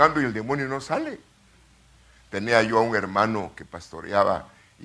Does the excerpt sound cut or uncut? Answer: uncut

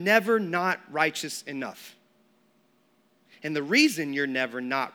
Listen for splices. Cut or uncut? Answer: uncut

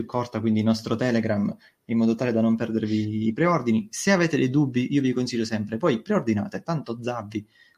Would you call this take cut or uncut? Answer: uncut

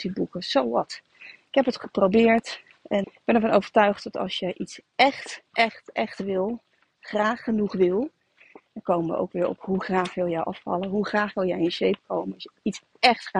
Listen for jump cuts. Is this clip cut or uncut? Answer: cut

